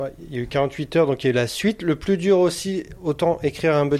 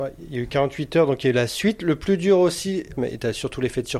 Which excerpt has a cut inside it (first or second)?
second